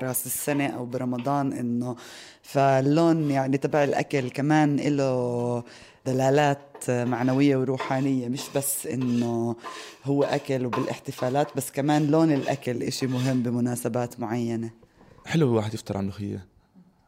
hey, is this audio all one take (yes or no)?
yes